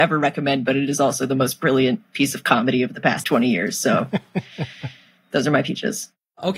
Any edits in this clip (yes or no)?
yes